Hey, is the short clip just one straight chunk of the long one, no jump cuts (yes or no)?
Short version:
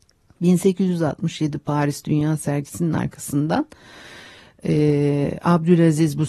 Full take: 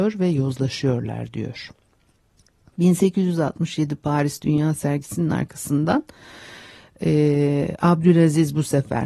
yes